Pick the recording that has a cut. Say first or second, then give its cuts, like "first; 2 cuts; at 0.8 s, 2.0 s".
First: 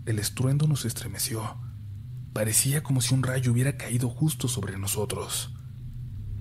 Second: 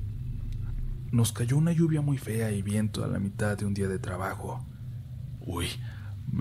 second; 2 cuts; at 1.1 s, 5.4 s